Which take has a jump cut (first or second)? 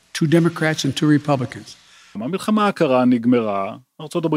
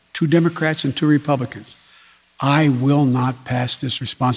first